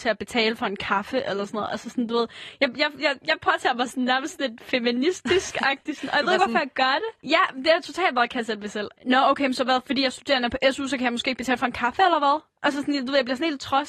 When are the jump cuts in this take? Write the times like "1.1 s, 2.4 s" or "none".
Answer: 7.2 s, 8.9 s